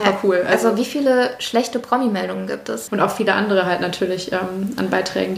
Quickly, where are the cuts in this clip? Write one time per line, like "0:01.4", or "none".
0:02.9